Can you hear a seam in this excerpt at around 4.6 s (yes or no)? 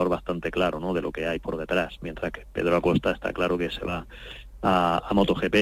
no